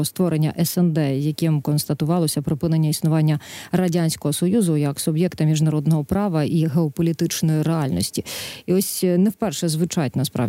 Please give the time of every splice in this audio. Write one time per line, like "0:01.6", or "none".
none